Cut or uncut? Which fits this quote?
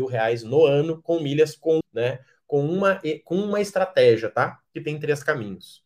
cut